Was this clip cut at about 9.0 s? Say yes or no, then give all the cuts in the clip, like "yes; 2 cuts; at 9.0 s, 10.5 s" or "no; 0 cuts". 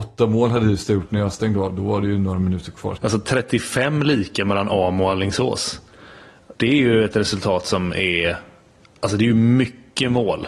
no; 2 cuts; at 3.0 s, 6.6 s